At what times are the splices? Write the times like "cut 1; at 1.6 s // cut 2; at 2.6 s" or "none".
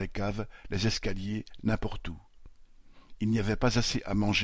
cut 1; at 1.6 s